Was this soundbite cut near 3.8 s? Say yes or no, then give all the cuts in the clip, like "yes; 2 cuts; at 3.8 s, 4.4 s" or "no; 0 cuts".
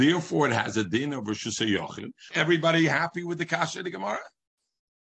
no; 1 cut; at 2.3 s